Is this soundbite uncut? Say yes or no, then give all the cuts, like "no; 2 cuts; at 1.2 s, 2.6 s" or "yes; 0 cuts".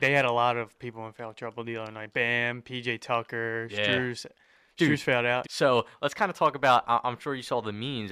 no; 1 cut; at 5.4 s